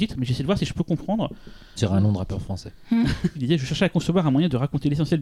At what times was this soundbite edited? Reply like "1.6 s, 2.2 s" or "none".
1.8 s, 3.4 s